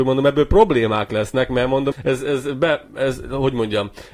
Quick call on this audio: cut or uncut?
cut